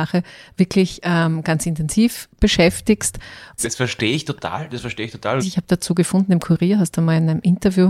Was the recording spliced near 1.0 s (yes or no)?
no